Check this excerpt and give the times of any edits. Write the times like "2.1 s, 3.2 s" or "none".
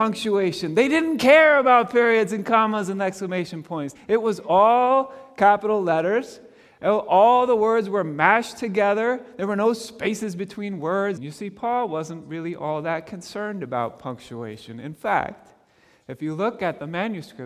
3.9 s, 11.2 s